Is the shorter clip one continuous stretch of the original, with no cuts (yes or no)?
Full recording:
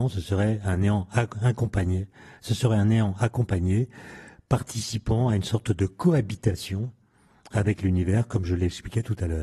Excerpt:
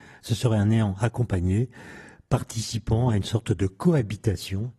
yes